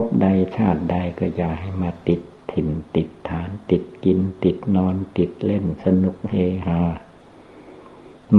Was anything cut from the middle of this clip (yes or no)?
no